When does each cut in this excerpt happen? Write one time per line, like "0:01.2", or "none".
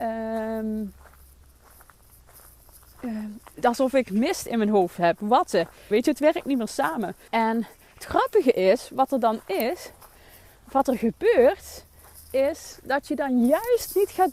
0:05.9
0:07.3